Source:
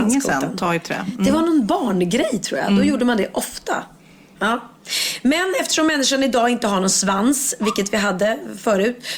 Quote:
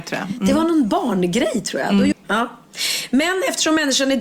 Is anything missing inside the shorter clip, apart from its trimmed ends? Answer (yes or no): yes